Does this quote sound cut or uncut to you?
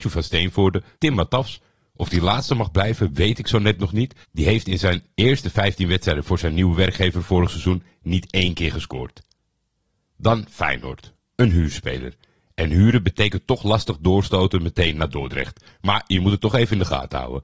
cut